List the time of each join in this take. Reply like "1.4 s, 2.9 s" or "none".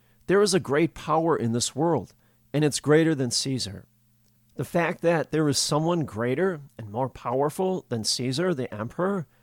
4.4 s